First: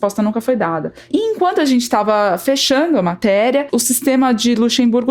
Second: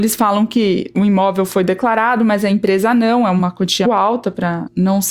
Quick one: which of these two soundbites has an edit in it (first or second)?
second